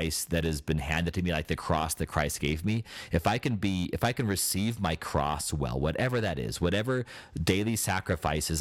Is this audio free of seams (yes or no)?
yes